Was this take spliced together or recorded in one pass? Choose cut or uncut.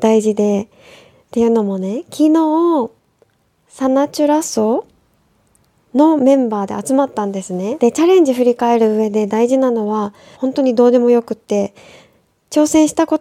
cut